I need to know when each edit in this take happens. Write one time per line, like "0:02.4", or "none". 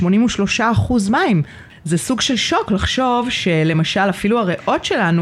none